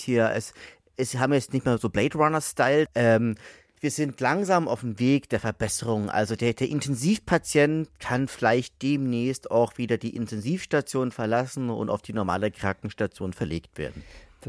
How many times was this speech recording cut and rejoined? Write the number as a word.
one